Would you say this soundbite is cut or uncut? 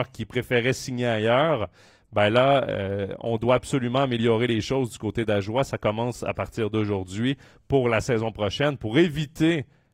uncut